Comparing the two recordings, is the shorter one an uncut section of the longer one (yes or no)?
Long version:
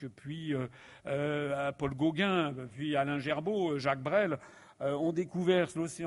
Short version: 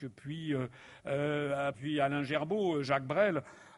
no